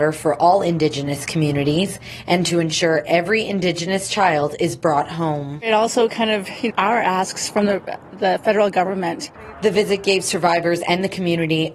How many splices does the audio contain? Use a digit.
1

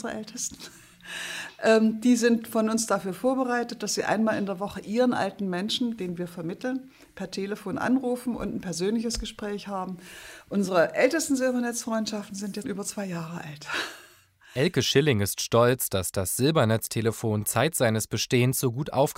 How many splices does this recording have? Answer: 1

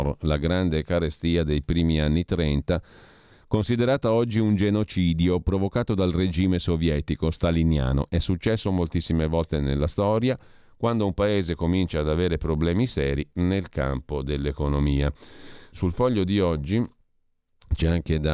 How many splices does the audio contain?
2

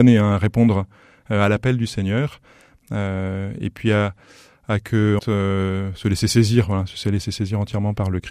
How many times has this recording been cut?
1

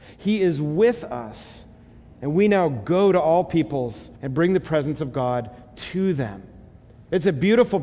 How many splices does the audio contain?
1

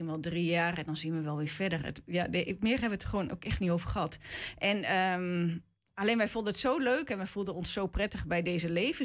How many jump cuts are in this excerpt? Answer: 0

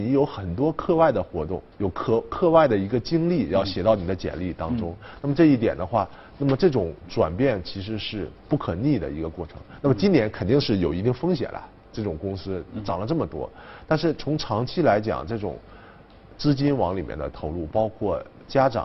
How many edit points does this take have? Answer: 1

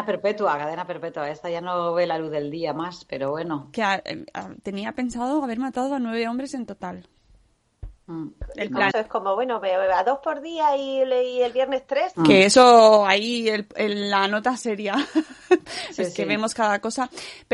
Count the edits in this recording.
2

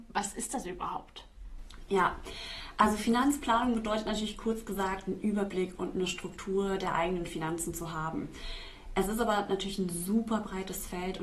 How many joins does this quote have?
0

